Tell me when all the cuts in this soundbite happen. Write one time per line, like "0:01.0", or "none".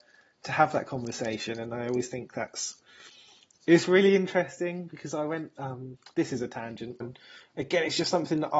0:07.0